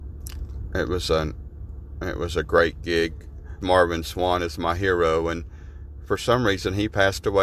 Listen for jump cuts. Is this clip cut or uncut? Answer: cut